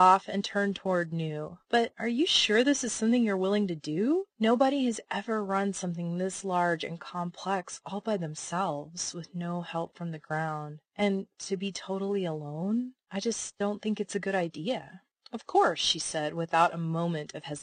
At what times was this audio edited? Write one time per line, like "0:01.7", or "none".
none